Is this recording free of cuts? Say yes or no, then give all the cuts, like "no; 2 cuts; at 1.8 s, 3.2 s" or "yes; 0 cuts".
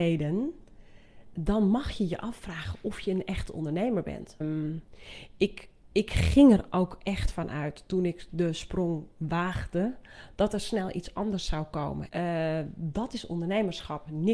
no; 2 cuts; at 4.4 s, 12.1 s